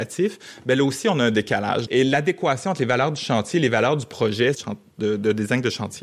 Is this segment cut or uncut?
cut